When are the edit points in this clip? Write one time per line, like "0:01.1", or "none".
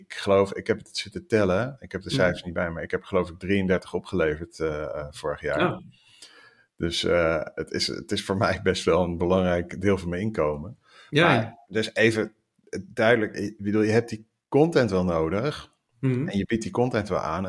none